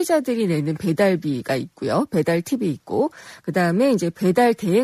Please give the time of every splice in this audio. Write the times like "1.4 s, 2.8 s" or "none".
none